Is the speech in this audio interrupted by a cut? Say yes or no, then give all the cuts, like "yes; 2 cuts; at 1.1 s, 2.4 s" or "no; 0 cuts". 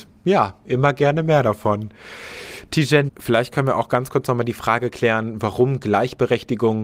yes; 1 cut; at 3.1 s